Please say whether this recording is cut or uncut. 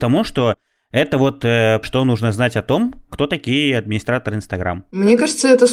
cut